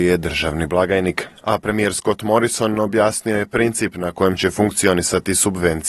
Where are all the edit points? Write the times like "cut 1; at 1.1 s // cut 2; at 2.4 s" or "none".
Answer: cut 1; at 1.4 s